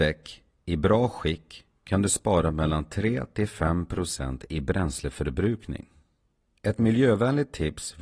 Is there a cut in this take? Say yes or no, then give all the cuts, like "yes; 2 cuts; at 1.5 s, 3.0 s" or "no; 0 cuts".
no; 0 cuts